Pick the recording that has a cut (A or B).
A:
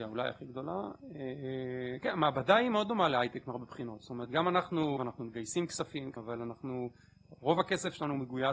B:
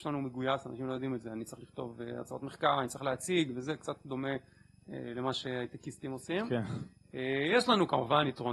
A